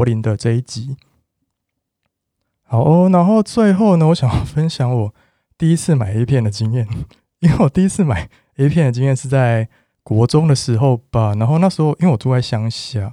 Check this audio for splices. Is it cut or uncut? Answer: uncut